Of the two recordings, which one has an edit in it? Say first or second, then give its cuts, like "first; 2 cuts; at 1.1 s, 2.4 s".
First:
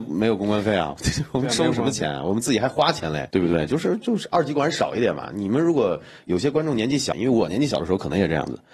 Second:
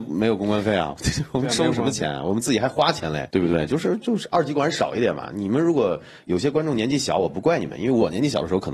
first; 1 cut; at 7.1 s